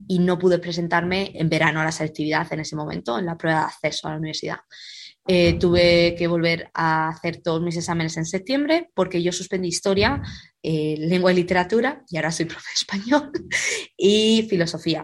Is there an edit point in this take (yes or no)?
yes